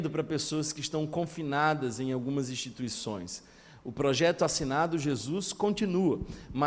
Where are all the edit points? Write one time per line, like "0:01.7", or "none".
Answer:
none